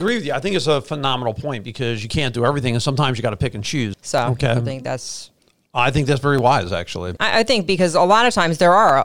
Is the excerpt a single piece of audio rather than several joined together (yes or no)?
no